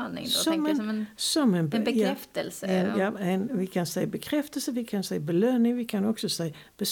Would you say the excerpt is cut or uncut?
uncut